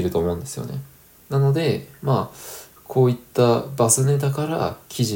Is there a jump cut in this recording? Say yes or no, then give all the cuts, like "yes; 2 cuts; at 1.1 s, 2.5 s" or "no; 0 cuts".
yes; 1 cut; at 1.2 s